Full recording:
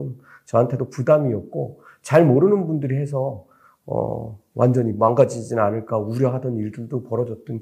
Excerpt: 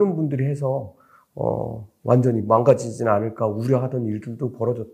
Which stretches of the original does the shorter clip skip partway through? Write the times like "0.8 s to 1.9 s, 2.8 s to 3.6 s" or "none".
none